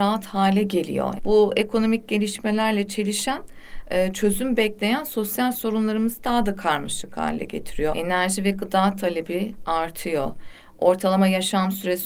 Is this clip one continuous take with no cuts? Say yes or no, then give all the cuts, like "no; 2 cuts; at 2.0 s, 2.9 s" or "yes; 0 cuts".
no; 2 cuts; at 1.2 s, 7.9 s